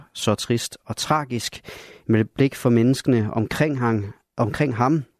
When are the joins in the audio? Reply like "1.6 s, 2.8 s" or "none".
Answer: 2.0 s